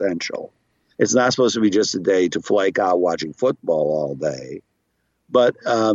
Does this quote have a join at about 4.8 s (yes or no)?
no